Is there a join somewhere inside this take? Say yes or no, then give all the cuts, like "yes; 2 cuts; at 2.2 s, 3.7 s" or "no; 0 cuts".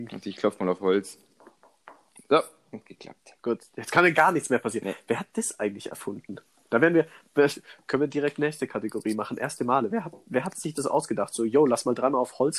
no; 0 cuts